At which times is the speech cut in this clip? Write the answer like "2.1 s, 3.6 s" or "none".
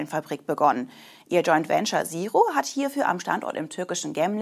none